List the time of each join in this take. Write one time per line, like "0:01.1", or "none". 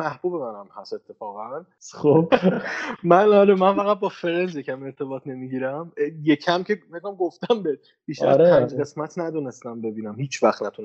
none